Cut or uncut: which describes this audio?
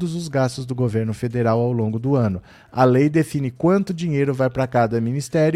uncut